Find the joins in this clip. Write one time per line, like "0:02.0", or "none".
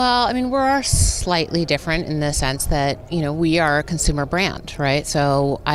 none